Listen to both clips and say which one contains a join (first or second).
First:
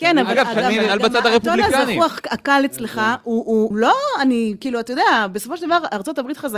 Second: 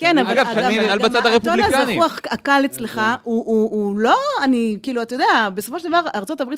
first